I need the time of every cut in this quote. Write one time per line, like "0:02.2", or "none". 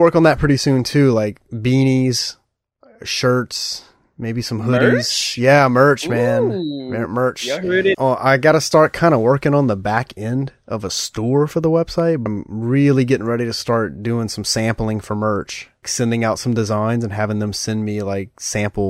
0:07.9
0:12.3
0:15.8